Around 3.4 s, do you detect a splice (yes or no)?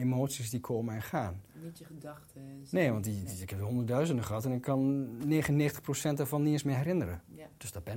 no